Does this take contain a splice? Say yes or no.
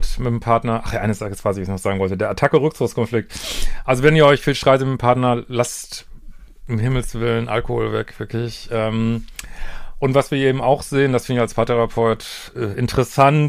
no